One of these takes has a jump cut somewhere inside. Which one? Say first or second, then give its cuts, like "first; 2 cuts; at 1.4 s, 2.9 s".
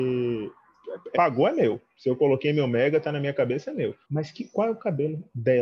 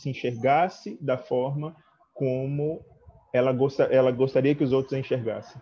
first; 2 cuts; at 1.1 s, 4.0 s